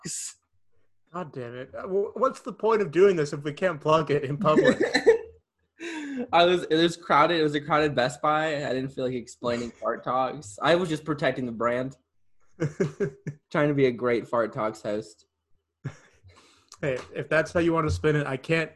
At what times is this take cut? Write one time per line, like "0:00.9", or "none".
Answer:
0:10.6
0:13.4